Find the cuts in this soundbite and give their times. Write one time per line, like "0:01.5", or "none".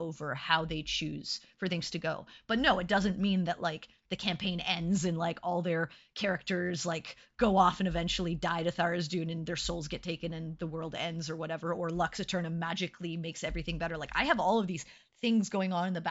none